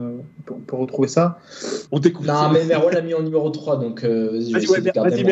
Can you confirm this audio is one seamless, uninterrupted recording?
no; 1 cut; at 1.9 s

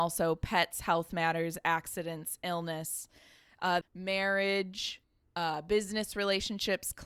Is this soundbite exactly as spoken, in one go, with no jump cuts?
no; 1 cut; at 3.8 s

